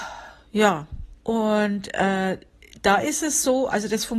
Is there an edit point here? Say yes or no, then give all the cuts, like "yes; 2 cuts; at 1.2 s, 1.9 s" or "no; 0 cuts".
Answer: yes; 1 cut; at 1.2 s